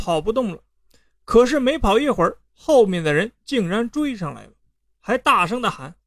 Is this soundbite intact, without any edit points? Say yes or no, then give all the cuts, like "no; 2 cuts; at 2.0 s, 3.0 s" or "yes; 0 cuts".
yes; 0 cuts